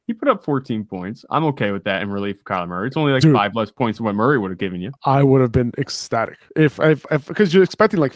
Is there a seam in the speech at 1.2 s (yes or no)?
no